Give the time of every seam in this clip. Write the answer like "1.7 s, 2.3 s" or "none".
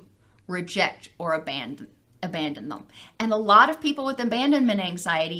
none

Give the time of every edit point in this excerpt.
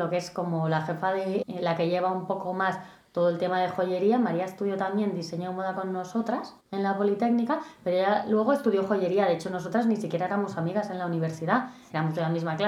1.4 s, 6.6 s

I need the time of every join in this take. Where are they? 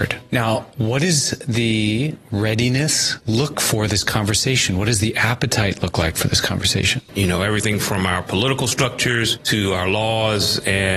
3.5 s, 7.1 s

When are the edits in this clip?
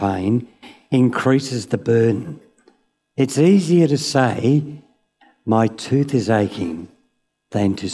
none

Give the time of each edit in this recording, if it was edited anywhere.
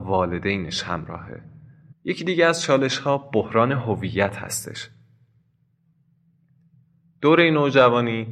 1.9 s

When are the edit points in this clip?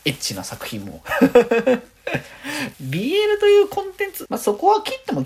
2.7 s, 4.2 s

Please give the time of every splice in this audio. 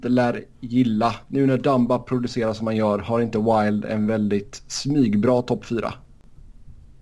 none

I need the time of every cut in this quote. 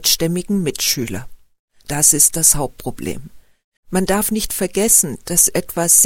3.8 s

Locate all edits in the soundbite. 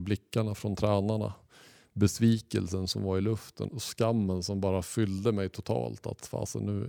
3.7 s

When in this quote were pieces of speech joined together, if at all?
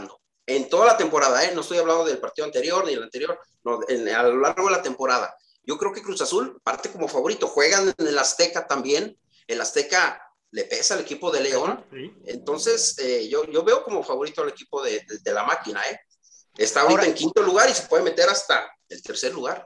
none

